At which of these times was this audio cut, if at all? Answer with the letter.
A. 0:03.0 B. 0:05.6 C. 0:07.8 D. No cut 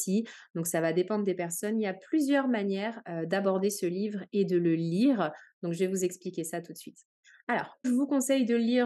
C